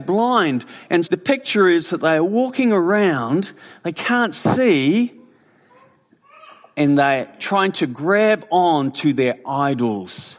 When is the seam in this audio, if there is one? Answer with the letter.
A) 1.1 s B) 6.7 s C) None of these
A